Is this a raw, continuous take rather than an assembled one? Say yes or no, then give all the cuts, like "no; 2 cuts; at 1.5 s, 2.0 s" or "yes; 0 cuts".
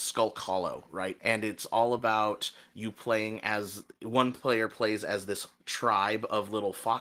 yes; 0 cuts